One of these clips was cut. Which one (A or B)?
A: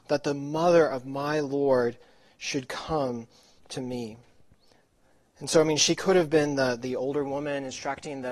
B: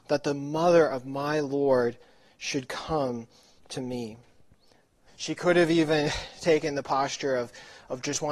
B